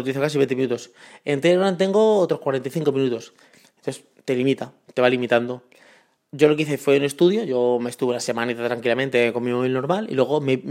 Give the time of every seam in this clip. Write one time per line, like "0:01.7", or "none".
none